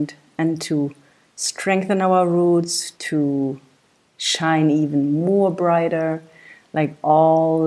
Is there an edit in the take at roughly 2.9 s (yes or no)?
yes